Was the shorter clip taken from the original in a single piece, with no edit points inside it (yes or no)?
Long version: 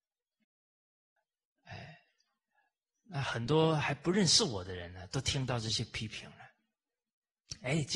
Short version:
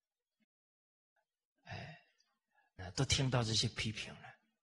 no